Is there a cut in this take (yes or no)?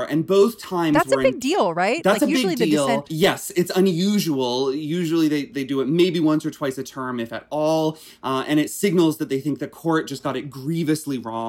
yes